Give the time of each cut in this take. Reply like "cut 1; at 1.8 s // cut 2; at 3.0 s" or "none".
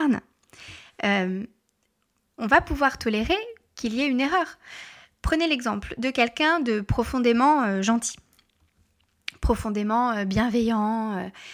none